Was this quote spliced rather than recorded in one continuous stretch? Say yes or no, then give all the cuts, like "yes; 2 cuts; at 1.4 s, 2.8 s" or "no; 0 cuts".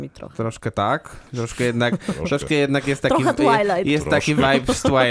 no; 0 cuts